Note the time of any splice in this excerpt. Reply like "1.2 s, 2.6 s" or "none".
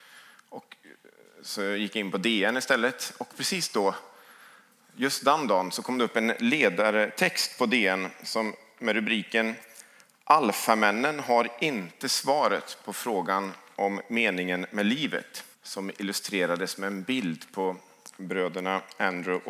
15.5 s